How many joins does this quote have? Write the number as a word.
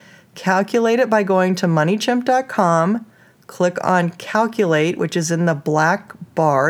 zero